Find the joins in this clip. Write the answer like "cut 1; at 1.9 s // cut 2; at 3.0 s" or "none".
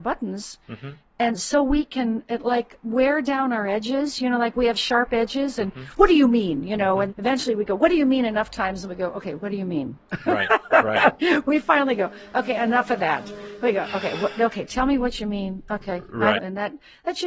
cut 1; at 7.1 s // cut 2; at 16.4 s